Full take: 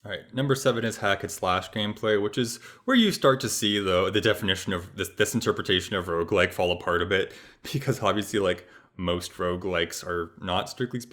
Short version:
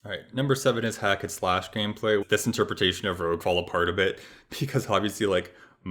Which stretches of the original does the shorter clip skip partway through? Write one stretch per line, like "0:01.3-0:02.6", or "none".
0:02.2-0:05.1
0:06.3-0:06.5